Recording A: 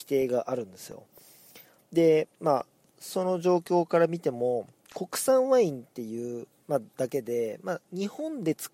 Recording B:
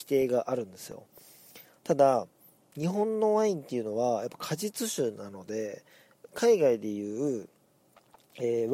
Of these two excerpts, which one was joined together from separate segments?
A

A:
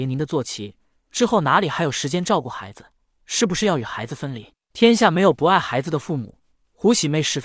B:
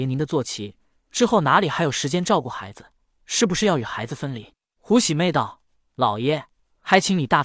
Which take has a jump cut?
B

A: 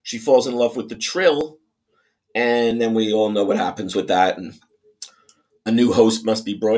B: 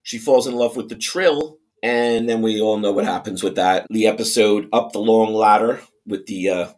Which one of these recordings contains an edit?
B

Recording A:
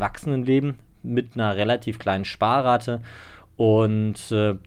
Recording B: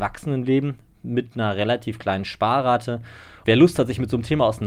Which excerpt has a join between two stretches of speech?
B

